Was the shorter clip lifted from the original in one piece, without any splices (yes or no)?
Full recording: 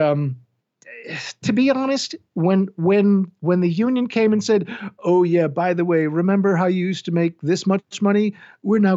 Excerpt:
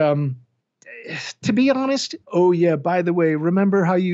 no